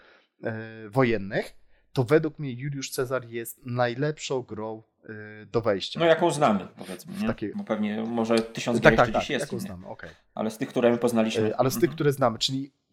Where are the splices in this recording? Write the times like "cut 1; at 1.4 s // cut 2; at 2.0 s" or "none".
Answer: none

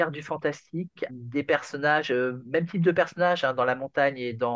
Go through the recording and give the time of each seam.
cut 1; at 1.1 s

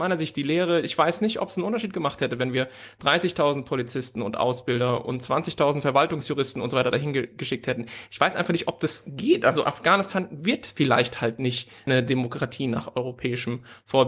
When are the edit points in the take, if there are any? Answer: none

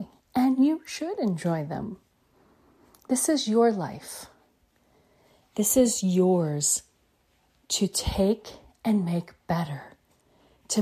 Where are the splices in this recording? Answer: none

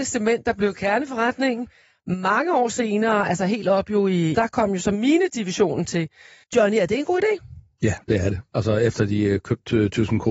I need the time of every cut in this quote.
cut 1; at 4.3 s // cut 2; at 6.4 s

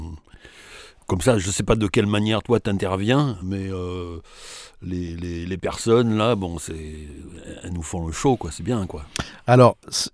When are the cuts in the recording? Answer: cut 1; at 3.4 s

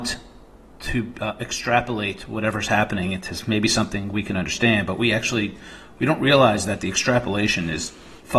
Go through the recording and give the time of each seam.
none

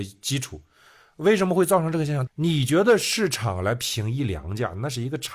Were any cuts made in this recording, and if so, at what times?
cut 1; at 2.3 s

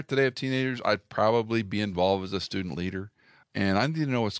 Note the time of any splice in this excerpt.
cut 1; at 3.4 s

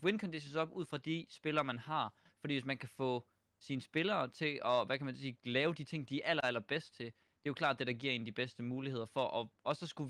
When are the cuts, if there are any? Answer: none

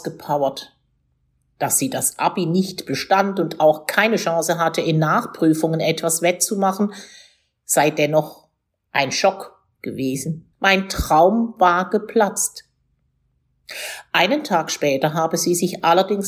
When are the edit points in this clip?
cut 1; at 10.5 s

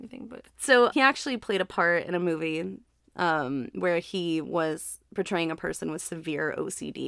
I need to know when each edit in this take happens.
cut 1; at 0.9 s

